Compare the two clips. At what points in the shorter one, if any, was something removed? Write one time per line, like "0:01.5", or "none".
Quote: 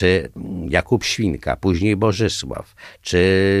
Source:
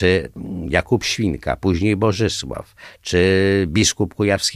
none